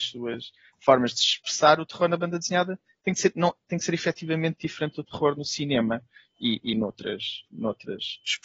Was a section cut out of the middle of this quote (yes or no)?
no